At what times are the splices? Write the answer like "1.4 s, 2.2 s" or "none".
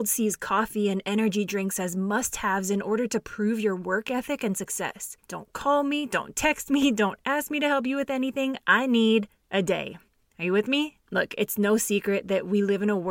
5.2 s